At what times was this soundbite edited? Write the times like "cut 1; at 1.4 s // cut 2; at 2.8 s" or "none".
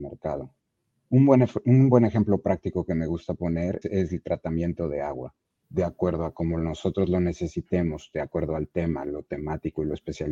cut 1; at 3.8 s // cut 2; at 5.6 s